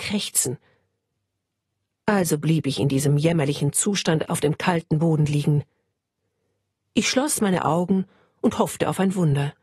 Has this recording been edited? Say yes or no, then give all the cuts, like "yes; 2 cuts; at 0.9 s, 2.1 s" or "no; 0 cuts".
no; 0 cuts